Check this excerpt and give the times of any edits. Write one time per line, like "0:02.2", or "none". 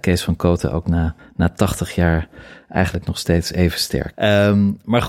0:04.1

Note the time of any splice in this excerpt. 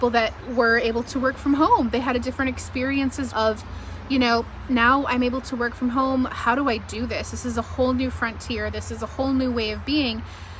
0:03.3

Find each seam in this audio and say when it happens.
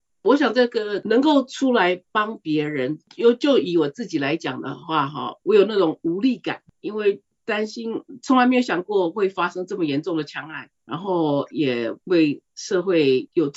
0:05.4

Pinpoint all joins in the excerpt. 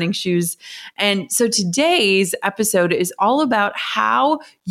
none

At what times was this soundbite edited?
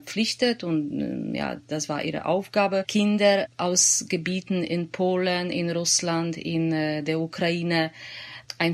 none

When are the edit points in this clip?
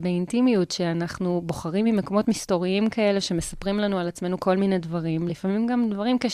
none

